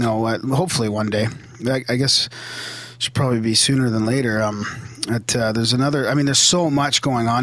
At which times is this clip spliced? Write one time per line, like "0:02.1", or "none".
none